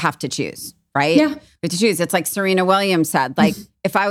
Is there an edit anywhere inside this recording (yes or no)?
no